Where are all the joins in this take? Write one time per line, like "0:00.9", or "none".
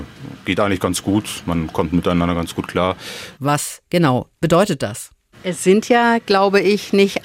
0:03.3
0:05.3

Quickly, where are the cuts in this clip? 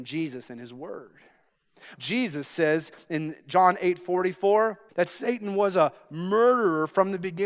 0:02.0
0:04.9

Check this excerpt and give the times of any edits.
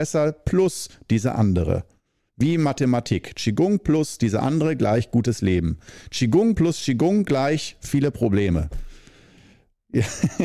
none

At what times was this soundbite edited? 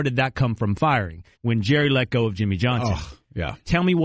0:01.3

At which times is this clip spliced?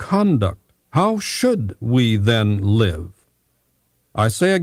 none

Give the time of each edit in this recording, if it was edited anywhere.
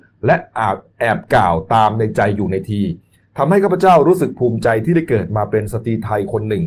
none

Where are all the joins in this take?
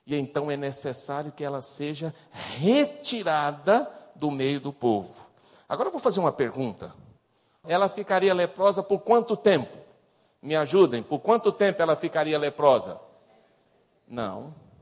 0:07.6

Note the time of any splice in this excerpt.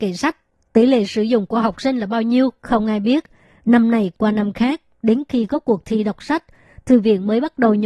none

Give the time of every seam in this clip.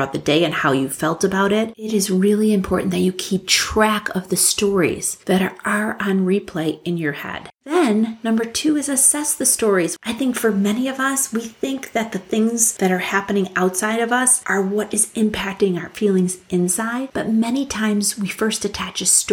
0:10.0

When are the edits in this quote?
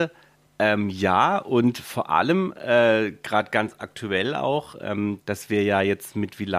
0:05.2

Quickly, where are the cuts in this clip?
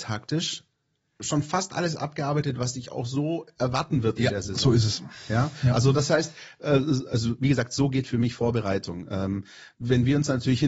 none

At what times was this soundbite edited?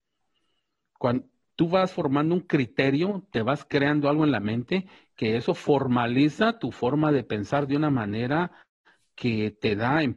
none

